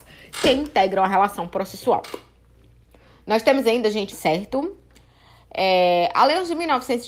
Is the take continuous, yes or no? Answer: no